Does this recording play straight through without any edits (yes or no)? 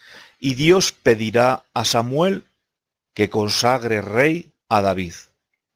no